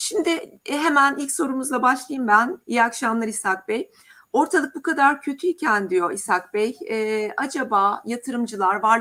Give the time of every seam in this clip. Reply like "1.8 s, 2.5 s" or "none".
2.6 s